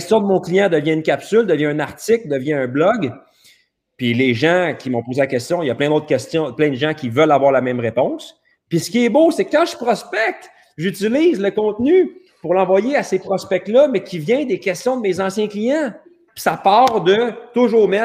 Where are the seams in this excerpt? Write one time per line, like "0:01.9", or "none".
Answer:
0:16.3